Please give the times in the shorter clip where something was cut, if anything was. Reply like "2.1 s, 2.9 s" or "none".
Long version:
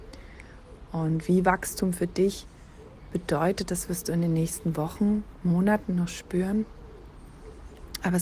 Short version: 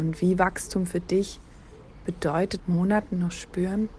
2.6 s